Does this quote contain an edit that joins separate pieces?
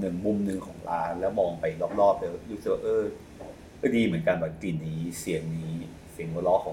yes; 1 cut; at 4.8 s

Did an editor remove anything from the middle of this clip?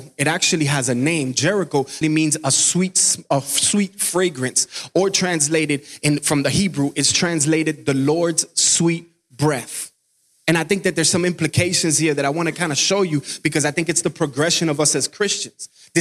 yes; 1 cut; at 2.0 s

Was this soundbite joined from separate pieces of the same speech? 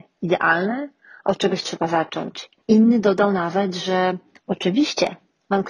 yes; 1 cut; at 2.6 s

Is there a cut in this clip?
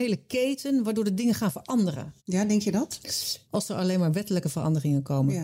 yes; 2 cuts; at 2.2 s, 3.4 s

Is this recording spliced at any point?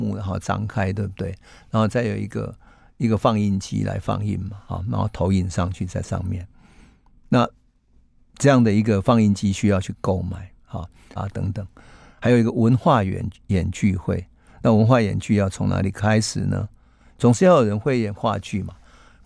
yes; 1 cut; at 11.2 s

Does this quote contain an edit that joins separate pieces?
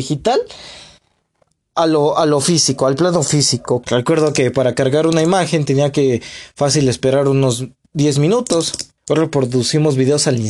yes; 2 cuts; at 3.8 s, 9.0 s

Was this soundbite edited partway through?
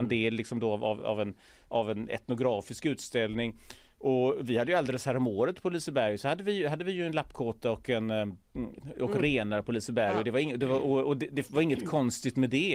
no; 0 cuts

